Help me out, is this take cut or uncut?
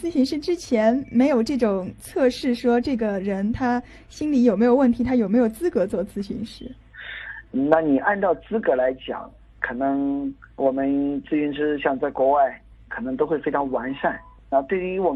uncut